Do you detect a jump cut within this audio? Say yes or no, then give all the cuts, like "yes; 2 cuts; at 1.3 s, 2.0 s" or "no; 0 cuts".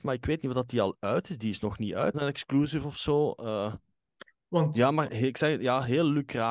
yes; 2 cuts; at 2.1 s, 4.3 s